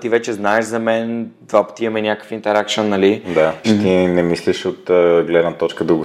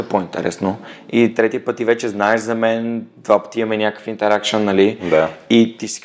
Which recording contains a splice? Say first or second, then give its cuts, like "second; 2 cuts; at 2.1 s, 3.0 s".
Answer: first; 1 cut; at 3.6 s